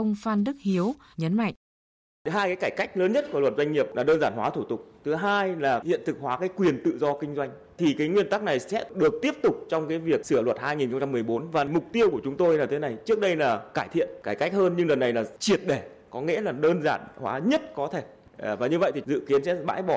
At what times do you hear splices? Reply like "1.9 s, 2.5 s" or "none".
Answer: 1.1 s